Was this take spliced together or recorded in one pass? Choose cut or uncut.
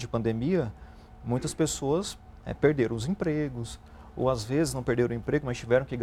uncut